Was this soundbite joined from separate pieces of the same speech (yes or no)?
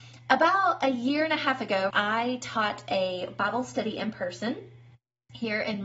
yes